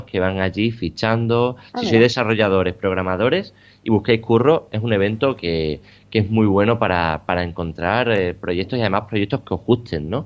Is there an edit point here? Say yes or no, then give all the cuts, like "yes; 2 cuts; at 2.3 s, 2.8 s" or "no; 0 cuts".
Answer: yes; 1 cut; at 1.7 s